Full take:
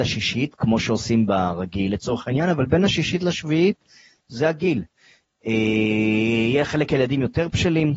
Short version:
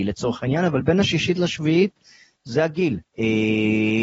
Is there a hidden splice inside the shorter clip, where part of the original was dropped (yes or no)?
yes